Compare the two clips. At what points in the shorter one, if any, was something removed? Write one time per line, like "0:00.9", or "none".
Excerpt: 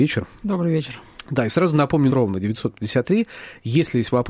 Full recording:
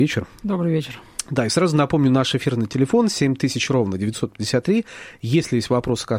0:02.1

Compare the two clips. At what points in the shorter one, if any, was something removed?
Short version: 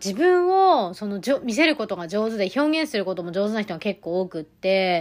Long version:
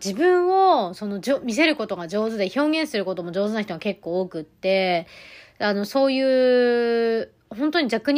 none

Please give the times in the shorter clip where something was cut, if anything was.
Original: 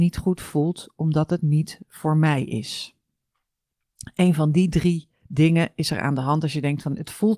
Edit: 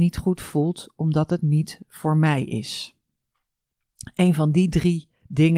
none

